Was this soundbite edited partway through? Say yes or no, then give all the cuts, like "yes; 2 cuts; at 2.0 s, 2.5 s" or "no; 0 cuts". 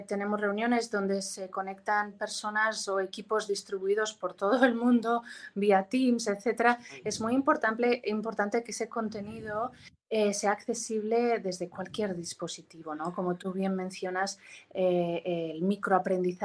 no; 0 cuts